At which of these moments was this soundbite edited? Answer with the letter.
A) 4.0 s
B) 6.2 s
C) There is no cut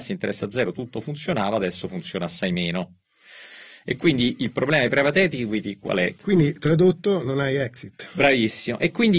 B